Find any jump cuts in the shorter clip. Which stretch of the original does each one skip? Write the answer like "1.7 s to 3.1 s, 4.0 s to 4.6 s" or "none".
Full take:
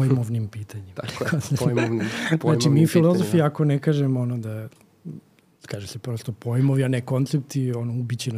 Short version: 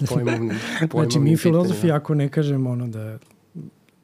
none